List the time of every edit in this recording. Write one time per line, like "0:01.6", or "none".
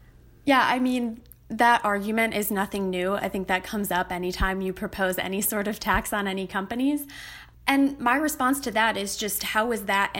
none